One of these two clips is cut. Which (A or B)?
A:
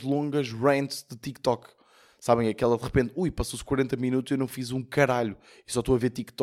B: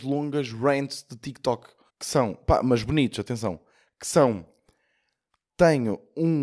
B